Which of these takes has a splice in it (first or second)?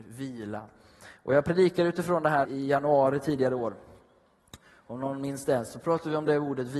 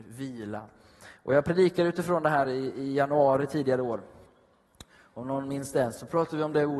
first